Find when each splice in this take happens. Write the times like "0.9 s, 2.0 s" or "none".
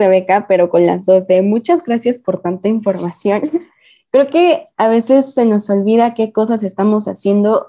none